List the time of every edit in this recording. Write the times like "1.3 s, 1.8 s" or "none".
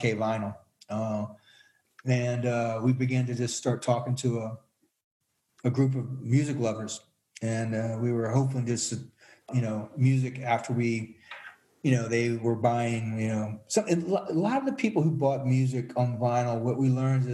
9.5 s